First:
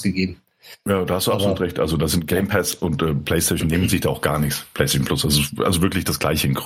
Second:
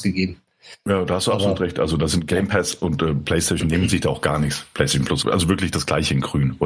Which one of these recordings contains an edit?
second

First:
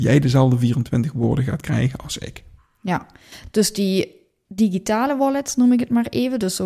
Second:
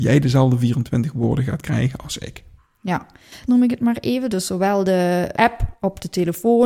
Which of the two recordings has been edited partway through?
second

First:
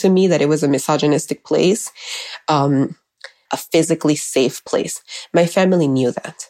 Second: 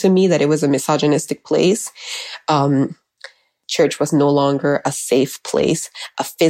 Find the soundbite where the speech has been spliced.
first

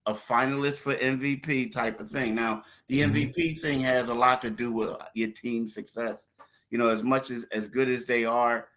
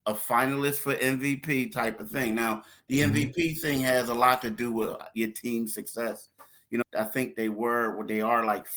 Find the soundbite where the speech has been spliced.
second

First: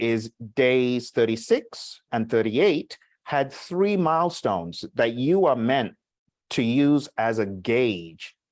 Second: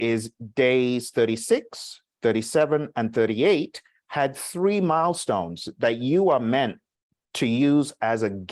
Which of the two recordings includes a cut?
first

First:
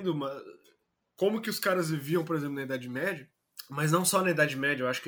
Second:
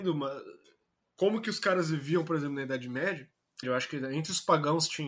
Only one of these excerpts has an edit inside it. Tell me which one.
second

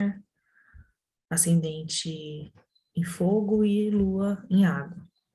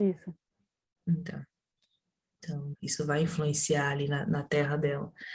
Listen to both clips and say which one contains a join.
second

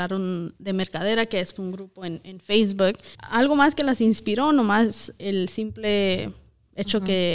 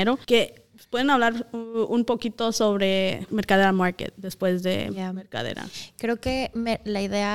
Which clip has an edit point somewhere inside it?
first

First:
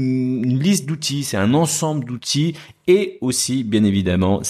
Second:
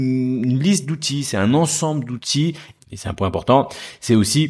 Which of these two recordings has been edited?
second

